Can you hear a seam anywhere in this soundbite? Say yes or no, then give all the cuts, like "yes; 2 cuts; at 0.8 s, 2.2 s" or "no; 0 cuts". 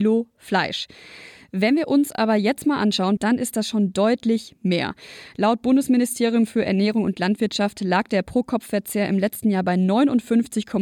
yes; 1 cut; at 3.2 s